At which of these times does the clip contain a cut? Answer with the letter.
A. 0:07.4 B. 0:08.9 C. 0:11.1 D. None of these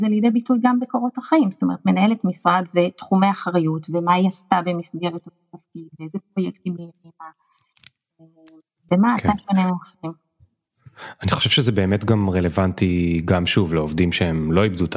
B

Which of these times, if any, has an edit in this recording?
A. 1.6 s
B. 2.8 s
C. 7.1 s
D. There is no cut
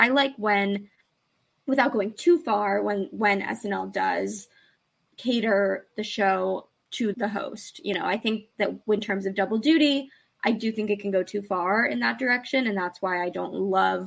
C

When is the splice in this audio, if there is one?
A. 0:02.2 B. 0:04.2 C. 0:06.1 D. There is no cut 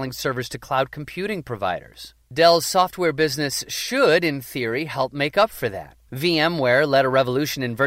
C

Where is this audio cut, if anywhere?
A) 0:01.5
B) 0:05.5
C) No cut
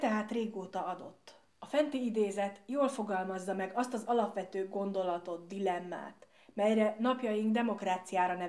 A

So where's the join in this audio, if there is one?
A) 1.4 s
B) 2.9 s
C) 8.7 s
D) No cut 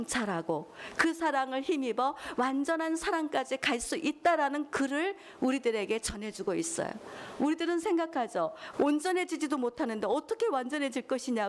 C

